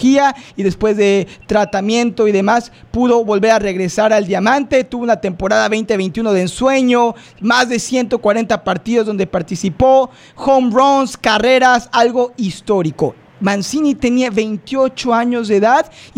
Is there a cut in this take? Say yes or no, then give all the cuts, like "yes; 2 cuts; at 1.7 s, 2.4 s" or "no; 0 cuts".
no; 0 cuts